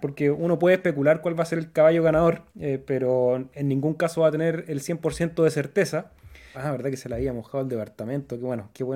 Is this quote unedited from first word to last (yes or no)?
no